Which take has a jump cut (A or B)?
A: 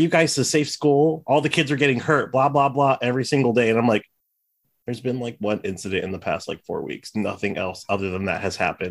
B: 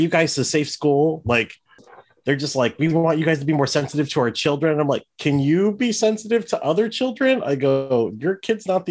B